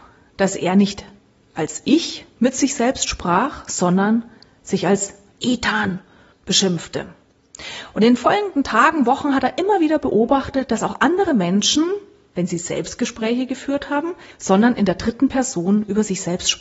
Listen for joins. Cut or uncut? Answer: cut